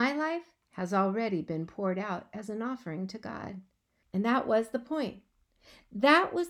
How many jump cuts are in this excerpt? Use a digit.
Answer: 1